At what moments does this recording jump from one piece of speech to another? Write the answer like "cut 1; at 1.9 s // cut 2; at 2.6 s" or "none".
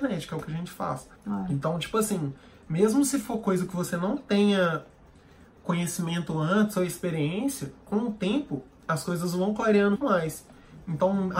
cut 1; at 1.2 s // cut 2; at 10.0 s

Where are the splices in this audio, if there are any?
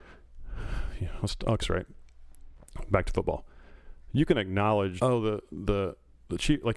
cut 1; at 1.6 s // cut 2; at 5.0 s

